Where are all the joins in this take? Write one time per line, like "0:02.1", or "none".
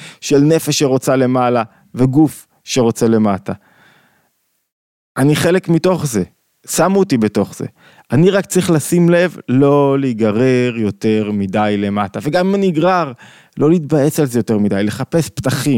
none